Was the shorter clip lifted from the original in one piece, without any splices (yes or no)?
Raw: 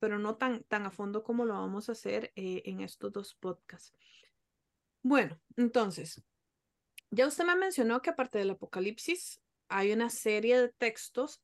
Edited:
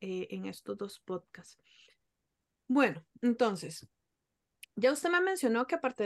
yes